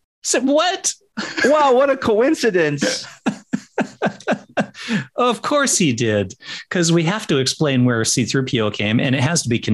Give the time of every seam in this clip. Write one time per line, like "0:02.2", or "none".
none